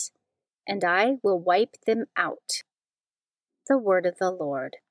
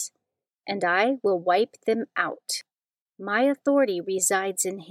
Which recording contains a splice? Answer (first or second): second